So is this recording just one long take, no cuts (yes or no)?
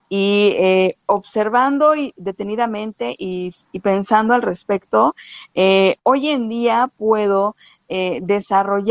no